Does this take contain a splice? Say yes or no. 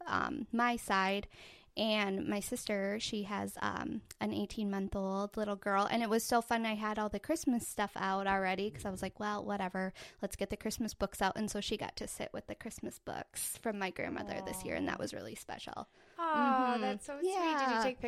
no